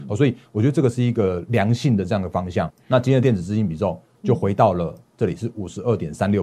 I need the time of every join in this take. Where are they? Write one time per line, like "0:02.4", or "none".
0:02.7